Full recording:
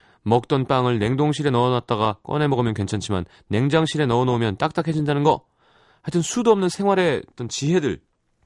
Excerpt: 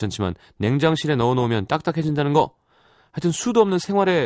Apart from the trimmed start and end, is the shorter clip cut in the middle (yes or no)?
no